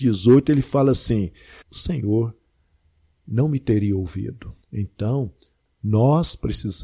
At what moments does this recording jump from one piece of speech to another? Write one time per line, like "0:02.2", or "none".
0:01.6
0:04.6